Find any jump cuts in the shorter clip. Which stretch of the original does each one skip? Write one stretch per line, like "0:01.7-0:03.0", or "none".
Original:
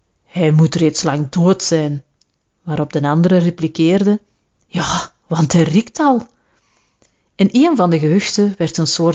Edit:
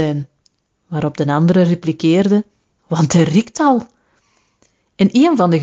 0:04.5-0:05.2